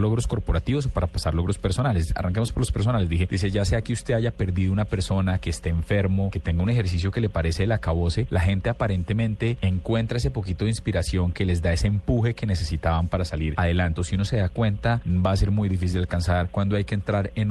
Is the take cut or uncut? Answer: cut